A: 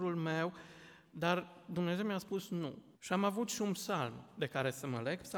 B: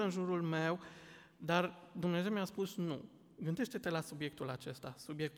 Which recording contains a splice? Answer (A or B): A